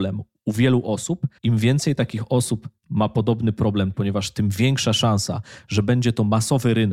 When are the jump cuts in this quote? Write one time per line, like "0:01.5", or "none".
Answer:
0:01.4
0:03.9